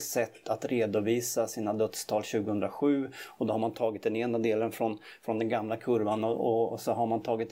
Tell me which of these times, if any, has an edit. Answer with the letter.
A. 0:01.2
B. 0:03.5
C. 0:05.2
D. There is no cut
D